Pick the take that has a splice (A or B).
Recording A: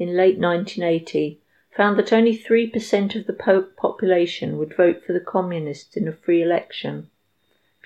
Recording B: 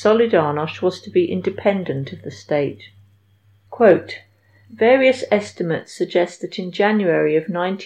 B